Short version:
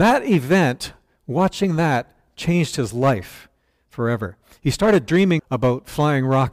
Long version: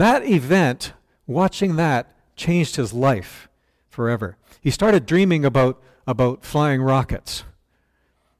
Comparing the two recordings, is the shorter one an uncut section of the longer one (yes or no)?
no